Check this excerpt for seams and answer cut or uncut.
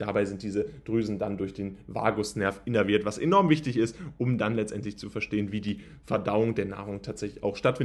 uncut